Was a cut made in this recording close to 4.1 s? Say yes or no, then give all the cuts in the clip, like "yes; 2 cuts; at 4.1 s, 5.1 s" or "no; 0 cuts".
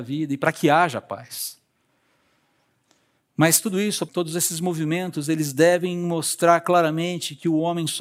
yes; 1 cut; at 4.1 s